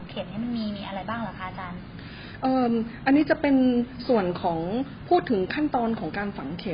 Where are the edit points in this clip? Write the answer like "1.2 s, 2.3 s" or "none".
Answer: none